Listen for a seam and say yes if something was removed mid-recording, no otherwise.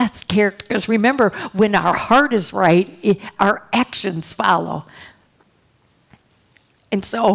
yes